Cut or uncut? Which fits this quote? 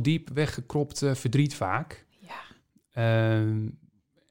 uncut